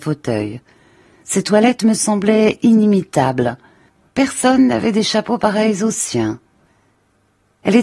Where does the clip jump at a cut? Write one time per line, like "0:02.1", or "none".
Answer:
none